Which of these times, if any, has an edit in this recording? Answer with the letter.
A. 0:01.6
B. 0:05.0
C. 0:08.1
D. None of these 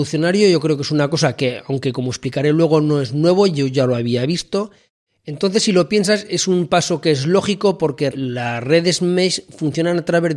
C